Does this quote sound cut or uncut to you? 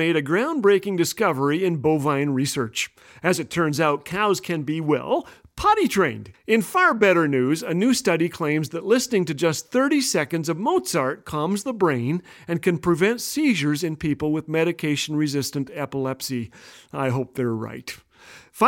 cut